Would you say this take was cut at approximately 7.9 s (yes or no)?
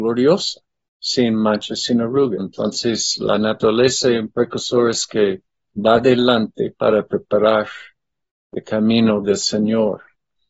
no